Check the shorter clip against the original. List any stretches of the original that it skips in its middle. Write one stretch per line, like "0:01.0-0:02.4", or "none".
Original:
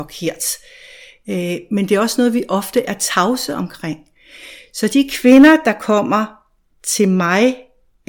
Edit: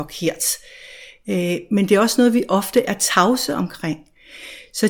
none